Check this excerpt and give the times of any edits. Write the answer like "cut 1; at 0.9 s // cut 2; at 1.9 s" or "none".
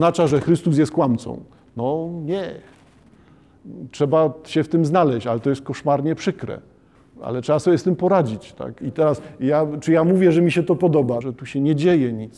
cut 1; at 8.8 s // cut 2; at 11.2 s

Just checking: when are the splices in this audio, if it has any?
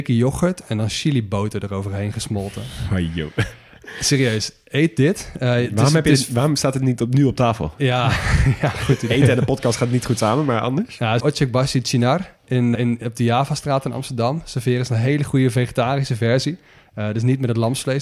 cut 1; at 11.2 s // cut 2; at 12.8 s

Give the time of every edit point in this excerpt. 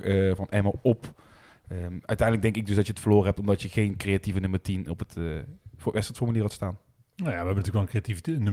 none

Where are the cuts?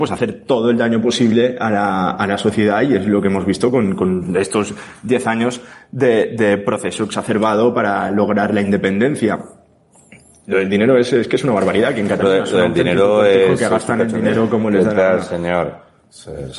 none

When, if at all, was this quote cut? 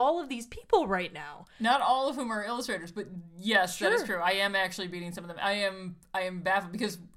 none

